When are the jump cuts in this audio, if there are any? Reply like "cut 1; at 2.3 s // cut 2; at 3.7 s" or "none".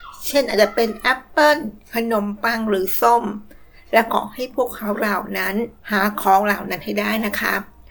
cut 1; at 5.8 s